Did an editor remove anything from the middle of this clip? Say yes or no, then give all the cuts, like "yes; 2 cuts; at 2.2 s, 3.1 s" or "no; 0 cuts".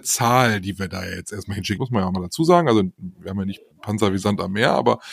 yes; 2 cuts; at 1.8 s, 3.7 s